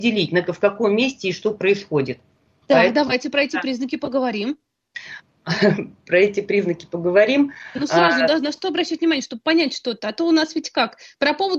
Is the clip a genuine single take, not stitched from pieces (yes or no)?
yes